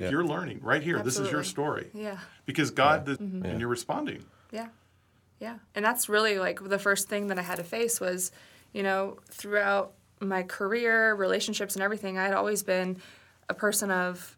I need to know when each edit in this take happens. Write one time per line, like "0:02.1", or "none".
0:03.2
0:05.7